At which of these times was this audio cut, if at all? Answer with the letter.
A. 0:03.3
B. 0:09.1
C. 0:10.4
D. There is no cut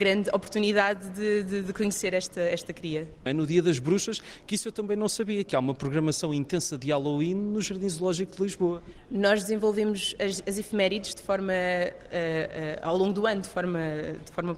A